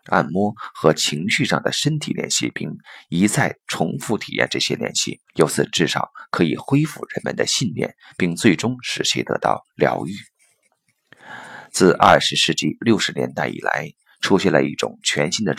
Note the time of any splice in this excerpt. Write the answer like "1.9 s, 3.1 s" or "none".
5.3 s